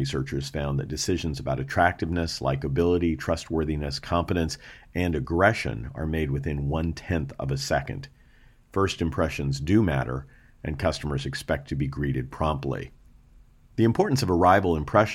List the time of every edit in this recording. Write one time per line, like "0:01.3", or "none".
none